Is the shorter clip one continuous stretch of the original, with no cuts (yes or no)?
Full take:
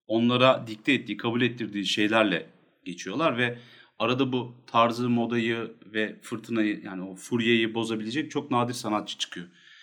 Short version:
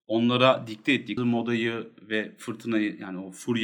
no